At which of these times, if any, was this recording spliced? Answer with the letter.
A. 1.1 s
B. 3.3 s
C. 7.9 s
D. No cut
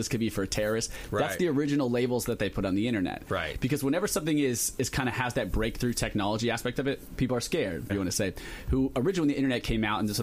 C